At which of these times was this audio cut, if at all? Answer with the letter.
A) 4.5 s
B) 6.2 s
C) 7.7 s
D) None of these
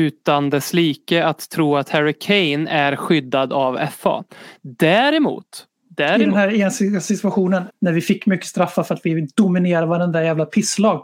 C